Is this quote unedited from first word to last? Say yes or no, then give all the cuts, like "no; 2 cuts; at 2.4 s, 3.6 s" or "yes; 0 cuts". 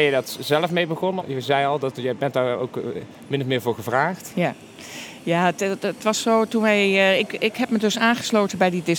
no; 1 cut; at 1.2 s